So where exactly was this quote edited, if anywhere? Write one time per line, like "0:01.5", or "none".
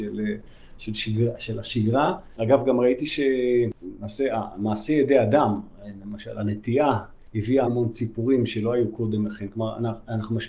0:07.7